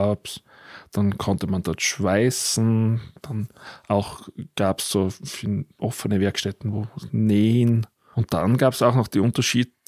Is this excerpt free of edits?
no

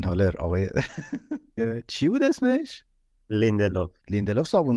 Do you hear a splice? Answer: yes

